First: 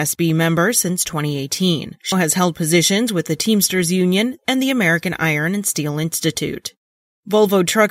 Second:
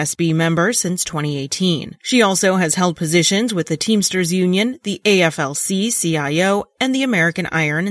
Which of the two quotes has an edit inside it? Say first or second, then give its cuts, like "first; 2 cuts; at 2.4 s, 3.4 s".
first; 2 cuts; at 2.1 s, 4.4 s